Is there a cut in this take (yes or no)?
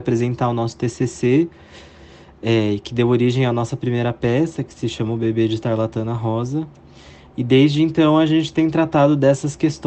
no